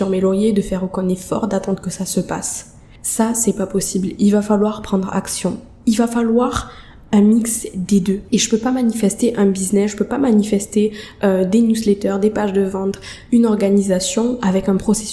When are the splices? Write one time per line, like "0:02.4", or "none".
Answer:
0:05.8